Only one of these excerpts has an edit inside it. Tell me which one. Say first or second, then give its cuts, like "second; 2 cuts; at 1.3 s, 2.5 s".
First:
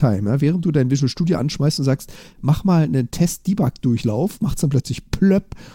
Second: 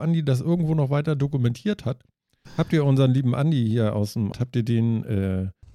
second; 2 cuts; at 2.4 s, 4.3 s